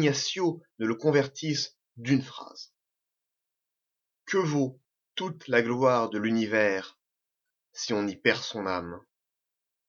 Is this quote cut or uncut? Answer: cut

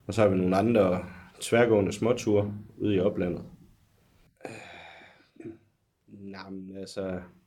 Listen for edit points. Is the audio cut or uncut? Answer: cut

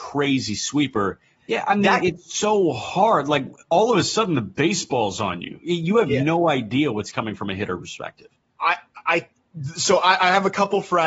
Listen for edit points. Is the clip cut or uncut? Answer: cut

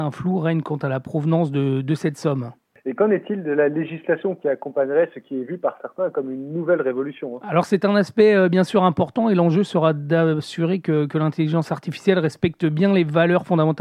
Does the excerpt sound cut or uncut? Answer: uncut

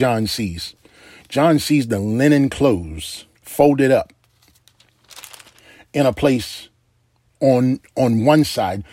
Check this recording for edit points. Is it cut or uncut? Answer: cut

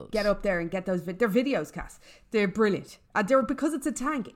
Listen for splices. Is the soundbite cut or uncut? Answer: cut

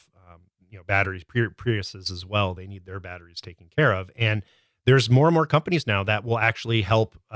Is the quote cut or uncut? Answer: uncut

